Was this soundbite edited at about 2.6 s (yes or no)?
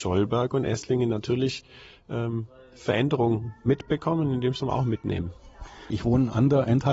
no